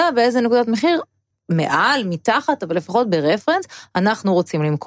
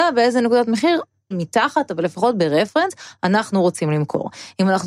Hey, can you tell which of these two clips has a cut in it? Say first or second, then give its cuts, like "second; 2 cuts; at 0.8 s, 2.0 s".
second; 1 cut; at 1.3 s